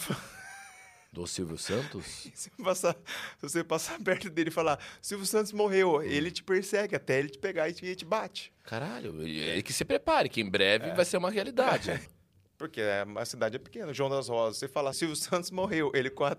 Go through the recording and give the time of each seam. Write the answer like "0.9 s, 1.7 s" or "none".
12.1 s, 14.9 s